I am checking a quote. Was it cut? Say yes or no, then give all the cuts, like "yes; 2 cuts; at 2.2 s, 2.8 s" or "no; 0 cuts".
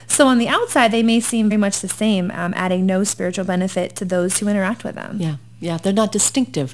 yes; 1 cut; at 1.5 s